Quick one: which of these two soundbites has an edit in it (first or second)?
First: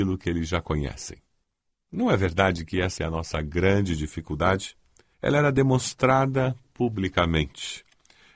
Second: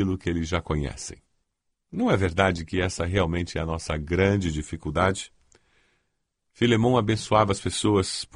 first